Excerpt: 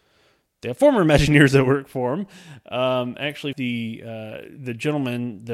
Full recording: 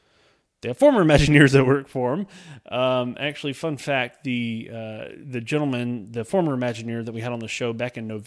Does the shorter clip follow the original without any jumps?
no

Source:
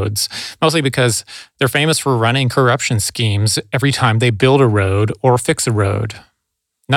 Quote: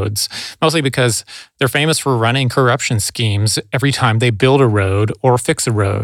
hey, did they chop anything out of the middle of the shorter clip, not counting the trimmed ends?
no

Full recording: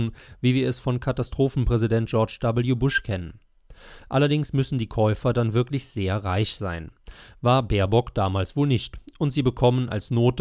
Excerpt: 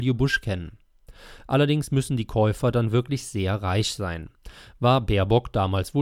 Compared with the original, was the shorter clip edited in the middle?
no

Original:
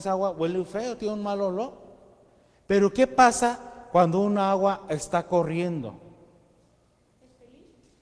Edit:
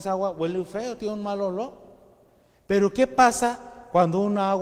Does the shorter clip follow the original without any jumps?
yes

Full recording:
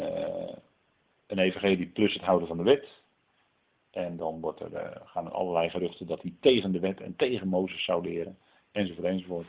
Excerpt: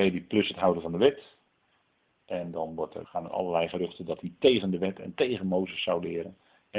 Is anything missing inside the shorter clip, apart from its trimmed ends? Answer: yes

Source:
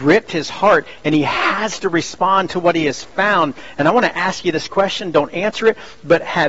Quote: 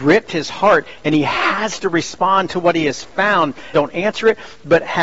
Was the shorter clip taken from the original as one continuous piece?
no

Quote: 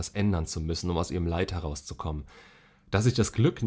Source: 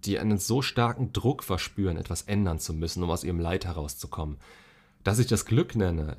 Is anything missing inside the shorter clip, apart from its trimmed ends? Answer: no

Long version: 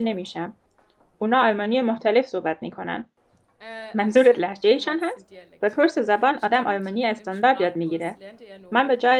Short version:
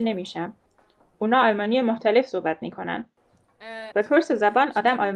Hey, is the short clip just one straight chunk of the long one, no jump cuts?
no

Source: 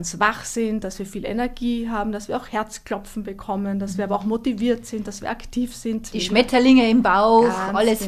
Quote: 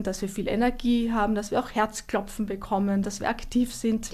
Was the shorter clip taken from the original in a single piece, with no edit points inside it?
no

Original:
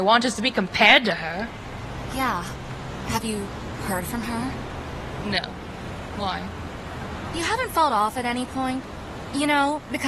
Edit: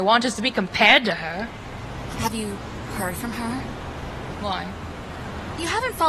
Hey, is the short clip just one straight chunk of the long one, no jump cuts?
no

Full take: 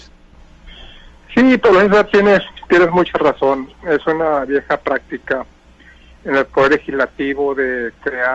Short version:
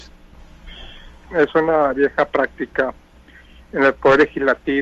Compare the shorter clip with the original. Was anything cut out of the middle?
yes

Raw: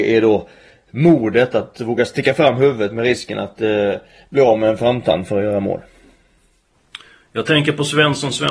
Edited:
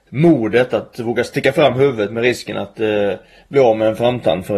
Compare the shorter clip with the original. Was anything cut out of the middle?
no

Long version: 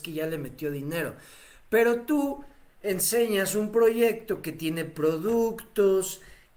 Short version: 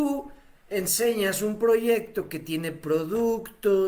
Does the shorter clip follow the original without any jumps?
yes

